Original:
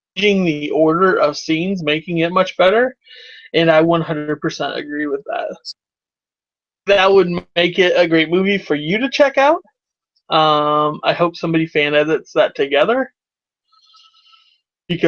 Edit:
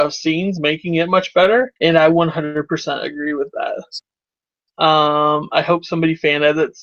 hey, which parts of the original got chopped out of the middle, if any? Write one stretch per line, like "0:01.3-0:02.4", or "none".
0:03.0-0:03.5
0:06.4-0:10.2